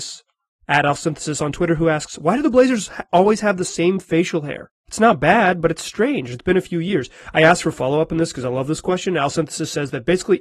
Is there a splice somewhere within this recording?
yes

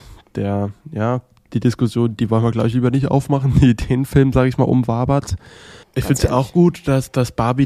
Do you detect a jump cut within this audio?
yes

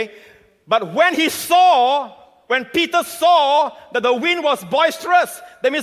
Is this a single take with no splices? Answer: yes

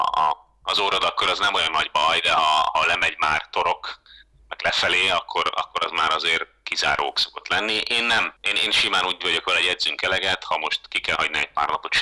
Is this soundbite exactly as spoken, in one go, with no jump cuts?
yes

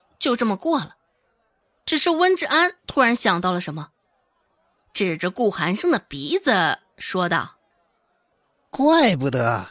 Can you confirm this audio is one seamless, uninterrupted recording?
yes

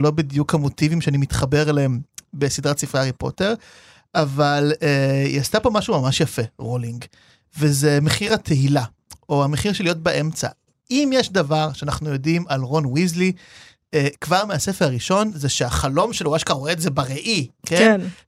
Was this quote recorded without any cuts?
yes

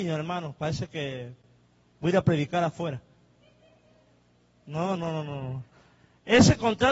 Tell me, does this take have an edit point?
yes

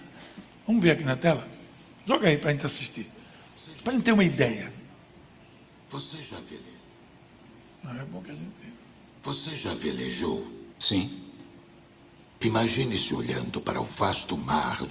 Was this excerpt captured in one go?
no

